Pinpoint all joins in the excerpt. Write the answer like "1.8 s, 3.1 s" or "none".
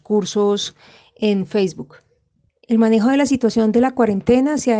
none